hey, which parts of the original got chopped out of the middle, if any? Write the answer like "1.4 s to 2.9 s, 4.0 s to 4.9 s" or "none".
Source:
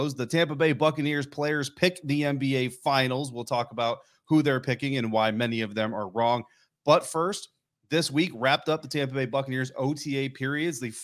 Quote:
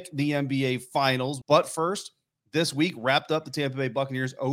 3.3 s to 6.8 s